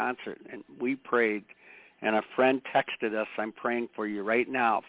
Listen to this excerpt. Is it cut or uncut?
uncut